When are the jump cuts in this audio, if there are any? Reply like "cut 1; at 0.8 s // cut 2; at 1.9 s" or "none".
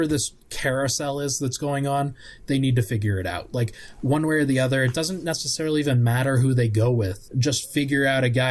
cut 1; at 7.3 s